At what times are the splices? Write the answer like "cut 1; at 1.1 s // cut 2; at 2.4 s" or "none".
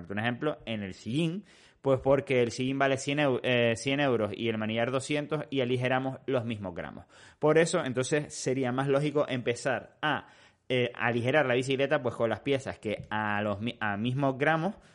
none